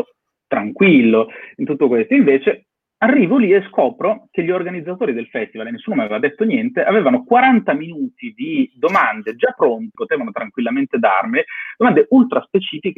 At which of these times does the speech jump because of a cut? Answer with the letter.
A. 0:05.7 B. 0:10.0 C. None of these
B